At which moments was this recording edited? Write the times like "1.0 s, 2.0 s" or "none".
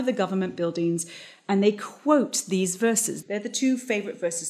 3.2 s

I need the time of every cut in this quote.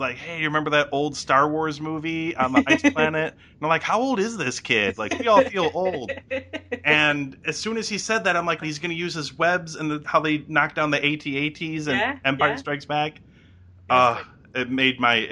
8.6 s, 10.0 s

